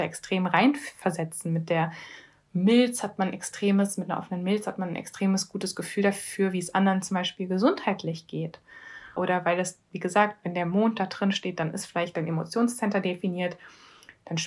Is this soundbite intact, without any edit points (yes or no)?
no